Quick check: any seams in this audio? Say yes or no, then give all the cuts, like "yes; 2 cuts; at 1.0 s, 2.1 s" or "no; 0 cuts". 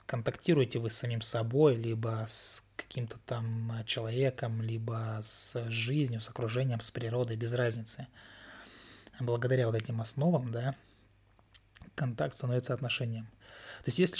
no; 0 cuts